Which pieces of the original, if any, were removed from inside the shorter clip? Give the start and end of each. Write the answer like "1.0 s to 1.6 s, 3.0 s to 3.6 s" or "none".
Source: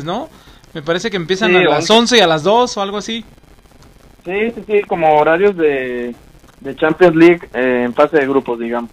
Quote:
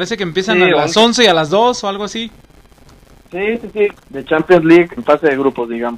4.9 s to 6.4 s, 7.5 s to 7.9 s